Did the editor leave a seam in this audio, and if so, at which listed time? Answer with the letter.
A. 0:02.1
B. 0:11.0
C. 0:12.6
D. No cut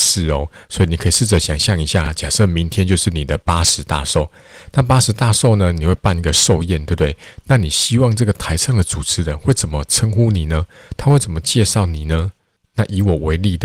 D